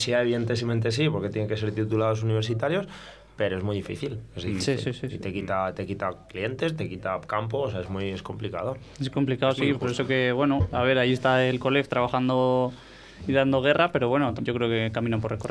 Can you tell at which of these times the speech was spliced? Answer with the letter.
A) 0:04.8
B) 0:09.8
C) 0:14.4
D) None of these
C